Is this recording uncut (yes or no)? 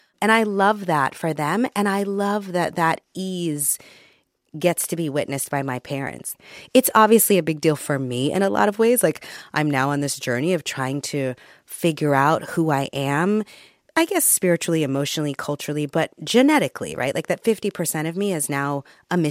yes